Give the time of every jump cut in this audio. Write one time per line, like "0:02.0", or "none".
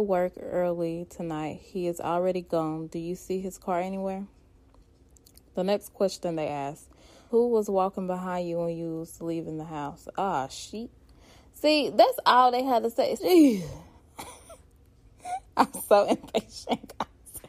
0:07.3
0:13.2